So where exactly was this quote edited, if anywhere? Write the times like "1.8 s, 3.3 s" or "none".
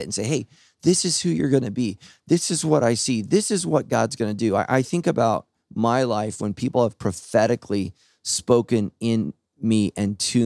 none